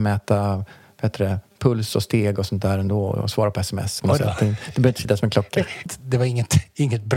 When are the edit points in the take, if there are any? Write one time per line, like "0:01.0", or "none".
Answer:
0:04.0
0:05.9